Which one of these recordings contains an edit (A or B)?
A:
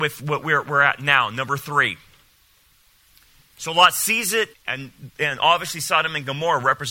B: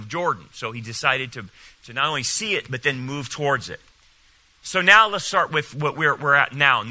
A